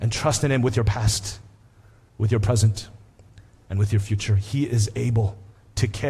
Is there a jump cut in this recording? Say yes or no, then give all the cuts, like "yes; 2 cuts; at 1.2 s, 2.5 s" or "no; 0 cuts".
no; 0 cuts